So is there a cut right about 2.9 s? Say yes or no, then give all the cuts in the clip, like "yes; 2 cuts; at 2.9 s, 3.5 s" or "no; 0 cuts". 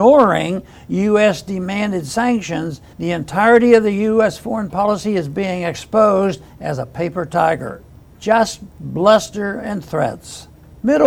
yes; 1 cut; at 2.9 s